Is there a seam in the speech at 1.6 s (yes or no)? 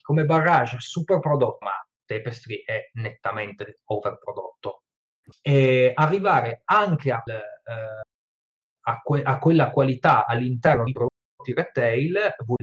yes